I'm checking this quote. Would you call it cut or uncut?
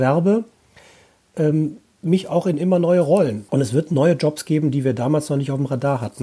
cut